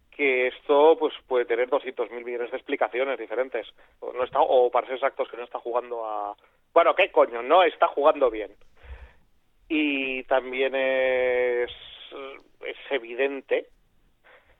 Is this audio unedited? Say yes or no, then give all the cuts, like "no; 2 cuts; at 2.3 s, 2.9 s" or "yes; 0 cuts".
no; 1 cut; at 3.9 s